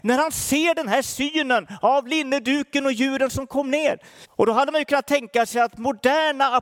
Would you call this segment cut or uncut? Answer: cut